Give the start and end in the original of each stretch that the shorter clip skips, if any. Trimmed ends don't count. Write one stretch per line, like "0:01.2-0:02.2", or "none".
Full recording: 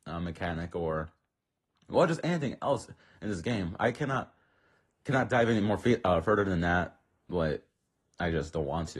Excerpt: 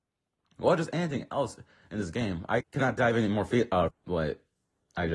0:03.9-0:04.9
0:06.2-0:07.1